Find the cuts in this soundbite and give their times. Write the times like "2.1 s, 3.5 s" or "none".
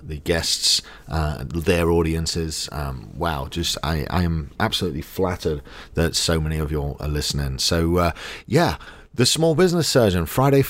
none